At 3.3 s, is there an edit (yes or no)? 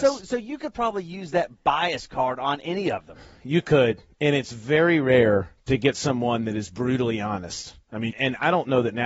no